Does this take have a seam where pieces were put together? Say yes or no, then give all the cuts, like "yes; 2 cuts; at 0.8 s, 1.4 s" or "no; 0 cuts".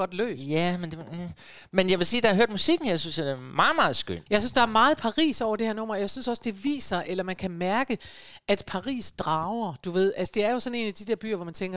no; 0 cuts